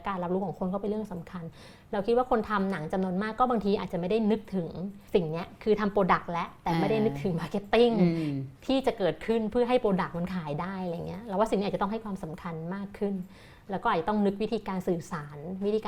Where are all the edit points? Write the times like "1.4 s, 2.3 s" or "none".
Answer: 5.1 s